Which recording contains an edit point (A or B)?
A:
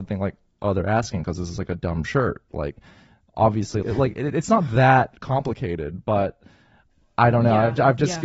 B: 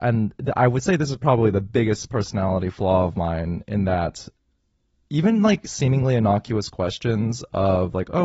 A